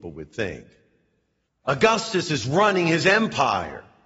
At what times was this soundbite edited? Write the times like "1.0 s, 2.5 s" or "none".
1.5 s